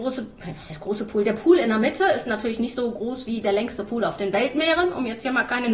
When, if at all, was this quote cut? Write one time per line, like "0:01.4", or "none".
none